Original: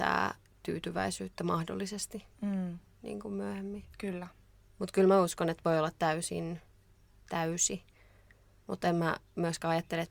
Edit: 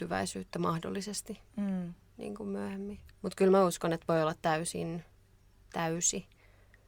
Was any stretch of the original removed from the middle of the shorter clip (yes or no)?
yes